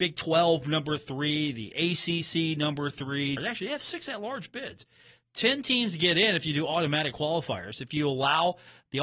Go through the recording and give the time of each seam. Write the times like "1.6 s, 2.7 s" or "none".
3.4 s